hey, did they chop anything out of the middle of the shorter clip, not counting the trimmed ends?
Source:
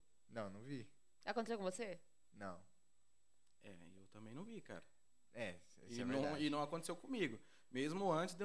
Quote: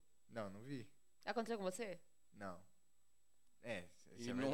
yes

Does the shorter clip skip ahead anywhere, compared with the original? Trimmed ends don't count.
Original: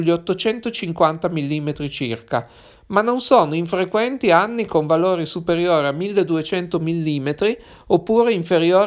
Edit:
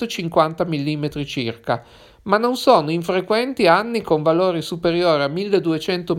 no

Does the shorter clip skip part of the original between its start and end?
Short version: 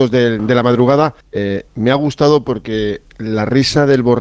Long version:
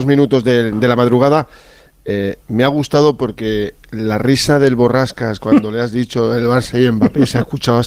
yes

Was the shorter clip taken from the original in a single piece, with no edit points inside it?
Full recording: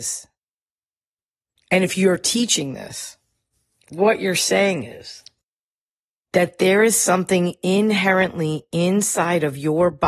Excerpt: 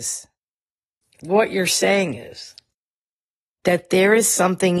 no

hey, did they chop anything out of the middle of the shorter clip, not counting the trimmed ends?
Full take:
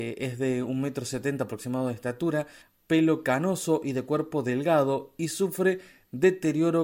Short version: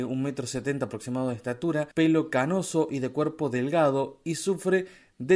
yes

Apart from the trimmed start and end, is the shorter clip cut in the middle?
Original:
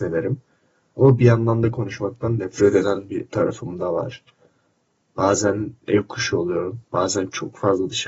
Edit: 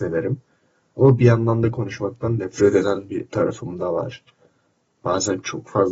yes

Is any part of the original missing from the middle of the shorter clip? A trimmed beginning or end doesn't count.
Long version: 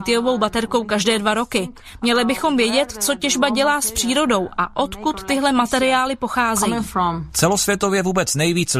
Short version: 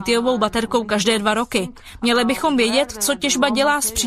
no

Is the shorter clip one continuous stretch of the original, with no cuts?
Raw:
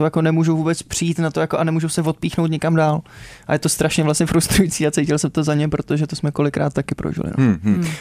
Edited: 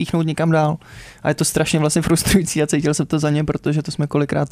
yes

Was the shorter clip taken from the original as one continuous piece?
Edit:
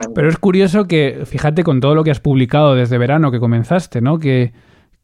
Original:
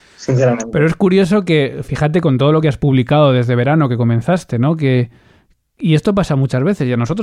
yes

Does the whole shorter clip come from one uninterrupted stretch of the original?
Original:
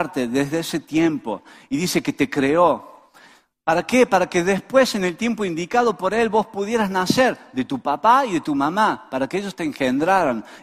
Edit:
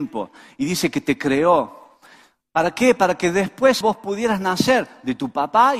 no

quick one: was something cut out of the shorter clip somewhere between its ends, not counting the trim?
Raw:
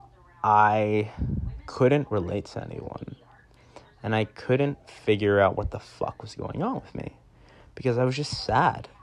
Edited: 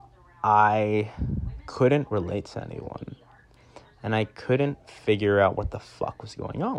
no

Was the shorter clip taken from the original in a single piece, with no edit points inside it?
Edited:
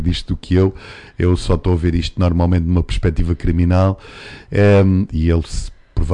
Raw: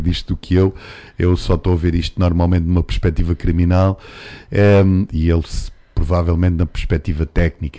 yes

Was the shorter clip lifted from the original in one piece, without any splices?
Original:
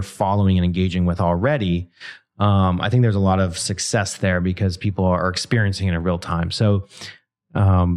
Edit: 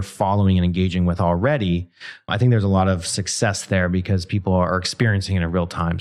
no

